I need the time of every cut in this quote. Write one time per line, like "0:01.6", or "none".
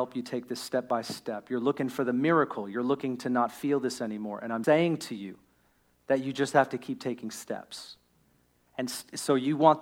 0:04.6